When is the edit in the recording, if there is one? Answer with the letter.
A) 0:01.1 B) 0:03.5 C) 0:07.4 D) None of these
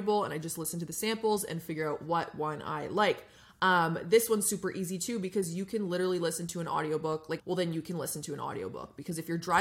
C